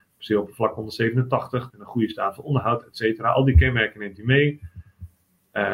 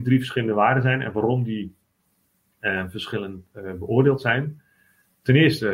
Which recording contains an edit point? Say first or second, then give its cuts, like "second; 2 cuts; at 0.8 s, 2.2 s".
first; 1 cut; at 1.7 s